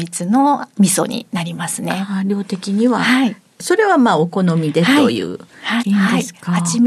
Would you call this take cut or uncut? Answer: cut